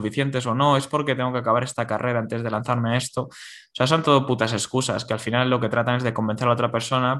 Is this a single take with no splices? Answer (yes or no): yes